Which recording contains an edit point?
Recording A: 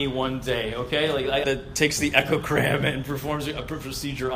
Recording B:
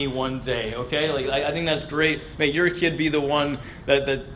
A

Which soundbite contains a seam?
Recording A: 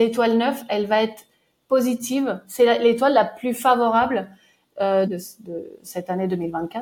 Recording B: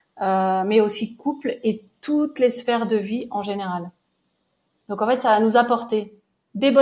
A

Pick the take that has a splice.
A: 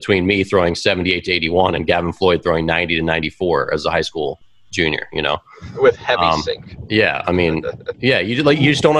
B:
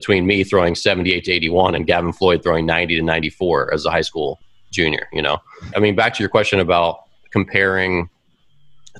B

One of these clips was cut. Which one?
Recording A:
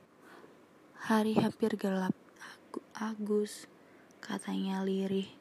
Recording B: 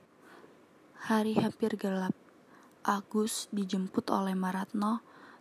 A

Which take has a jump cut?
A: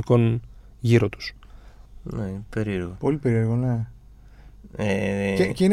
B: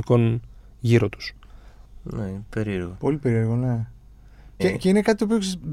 B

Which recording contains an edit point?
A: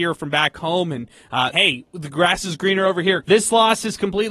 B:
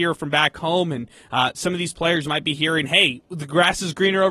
A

